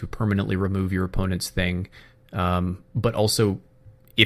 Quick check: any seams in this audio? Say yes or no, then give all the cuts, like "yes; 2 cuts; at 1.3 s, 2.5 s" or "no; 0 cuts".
no; 0 cuts